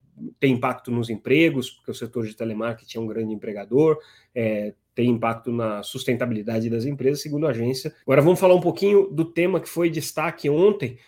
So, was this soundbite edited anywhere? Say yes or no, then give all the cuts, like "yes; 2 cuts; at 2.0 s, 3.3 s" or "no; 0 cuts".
yes; 1 cut; at 8.0 s